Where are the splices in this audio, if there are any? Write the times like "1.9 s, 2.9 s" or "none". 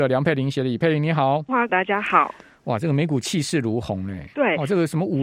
1.7 s